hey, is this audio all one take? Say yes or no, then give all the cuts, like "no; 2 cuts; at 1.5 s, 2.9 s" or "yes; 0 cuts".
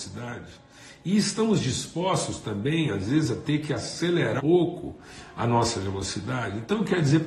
no; 1 cut; at 4.4 s